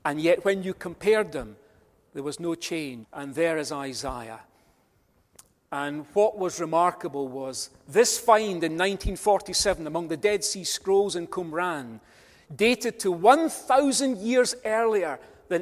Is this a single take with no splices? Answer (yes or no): no